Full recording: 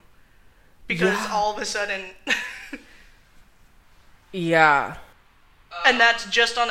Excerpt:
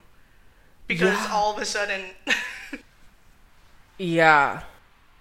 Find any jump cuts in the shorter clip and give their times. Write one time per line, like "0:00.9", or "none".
0:02.8

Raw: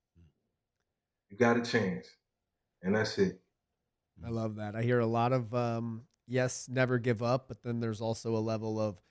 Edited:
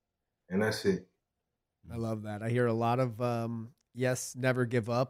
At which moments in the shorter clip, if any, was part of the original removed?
none

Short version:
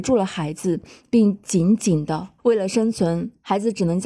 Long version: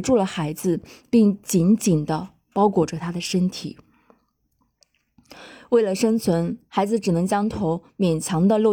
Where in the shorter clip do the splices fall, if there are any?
0:02.4

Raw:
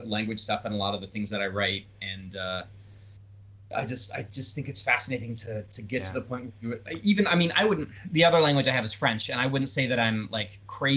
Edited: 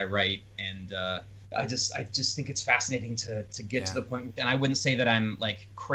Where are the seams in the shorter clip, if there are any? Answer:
0:01.4
0:04.4

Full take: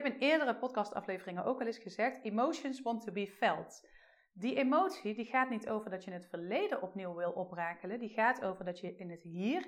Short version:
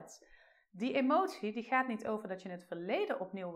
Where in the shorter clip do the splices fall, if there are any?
none

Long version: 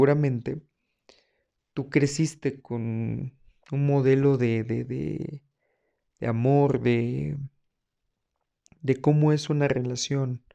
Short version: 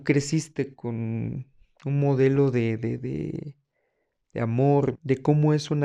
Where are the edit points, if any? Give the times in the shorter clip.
0:04.9

